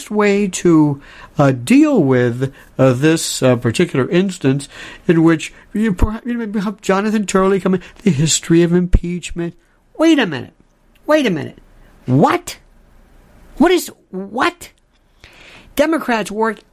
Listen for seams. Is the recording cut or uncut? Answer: uncut